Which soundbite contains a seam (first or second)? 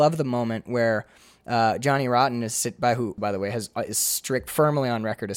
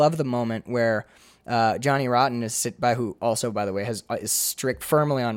first